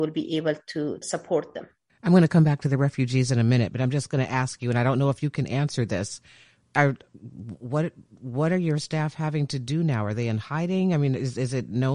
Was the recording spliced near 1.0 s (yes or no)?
yes